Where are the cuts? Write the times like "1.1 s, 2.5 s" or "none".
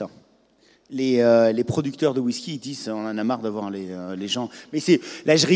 none

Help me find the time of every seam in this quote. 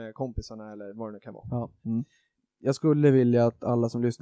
1.8 s

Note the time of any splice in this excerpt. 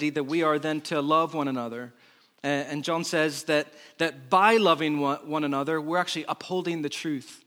none

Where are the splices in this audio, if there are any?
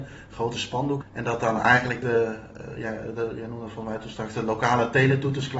1.0 s

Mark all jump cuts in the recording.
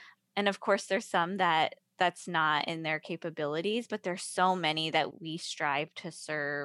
5.1 s

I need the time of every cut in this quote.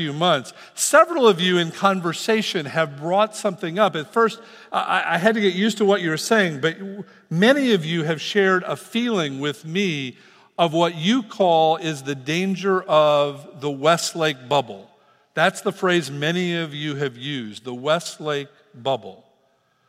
none

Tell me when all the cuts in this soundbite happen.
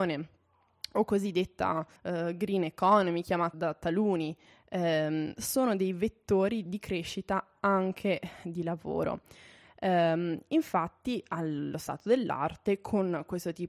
2.0 s, 3.5 s, 6.7 s

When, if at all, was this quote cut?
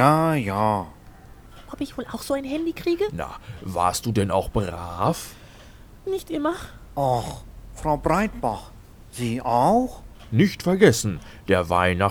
10.3 s

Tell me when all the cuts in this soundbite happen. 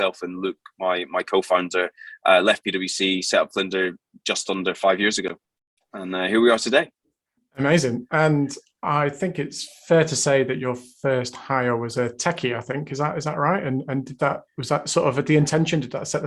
none

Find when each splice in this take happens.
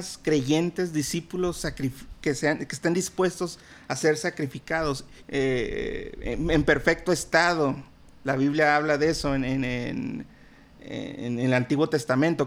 5.2 s

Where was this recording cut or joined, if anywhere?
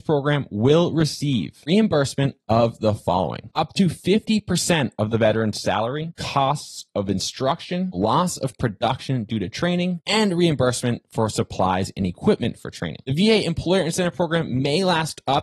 none

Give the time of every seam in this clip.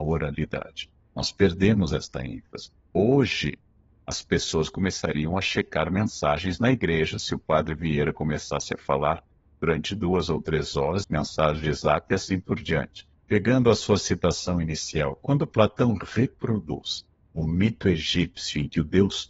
2.9 s, 11.0 s, 13.2 s

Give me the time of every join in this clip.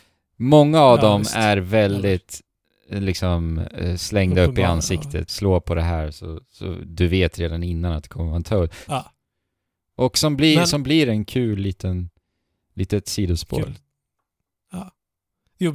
5.3 s, 8.9 s

